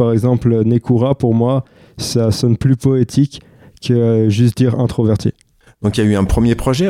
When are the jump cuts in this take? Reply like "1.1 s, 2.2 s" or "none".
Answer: none